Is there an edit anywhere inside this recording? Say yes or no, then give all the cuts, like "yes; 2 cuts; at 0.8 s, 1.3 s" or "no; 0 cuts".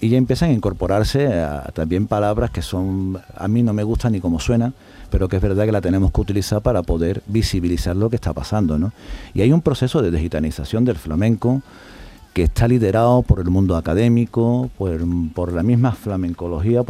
no; 0 cuts